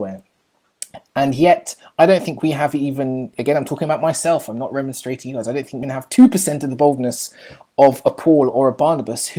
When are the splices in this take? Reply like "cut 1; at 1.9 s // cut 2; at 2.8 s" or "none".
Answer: cut 1; at 3.3 s // cut 2; at 5.8 s